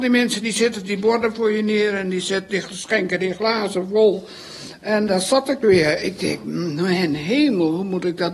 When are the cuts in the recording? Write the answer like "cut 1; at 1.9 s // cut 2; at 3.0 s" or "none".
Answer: none